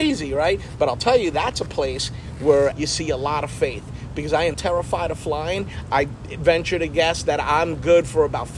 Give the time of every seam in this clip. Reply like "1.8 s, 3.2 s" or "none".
2.7 s, 4.5 s